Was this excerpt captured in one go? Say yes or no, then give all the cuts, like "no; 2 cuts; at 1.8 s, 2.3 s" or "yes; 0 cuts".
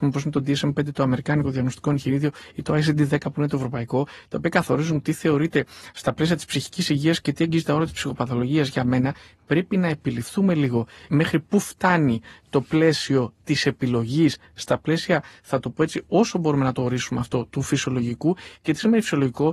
yes; 0 cuts